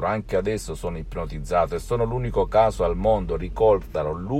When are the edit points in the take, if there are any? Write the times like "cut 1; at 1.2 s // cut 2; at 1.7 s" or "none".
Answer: none